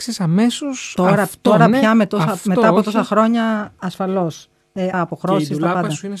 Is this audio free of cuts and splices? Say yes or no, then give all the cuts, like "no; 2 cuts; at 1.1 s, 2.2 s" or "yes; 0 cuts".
no; 1 cut; at 4.9 s